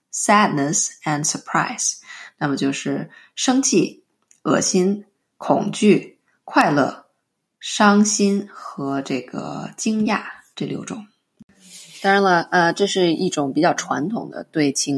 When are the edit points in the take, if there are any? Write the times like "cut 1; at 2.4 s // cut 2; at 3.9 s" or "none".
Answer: none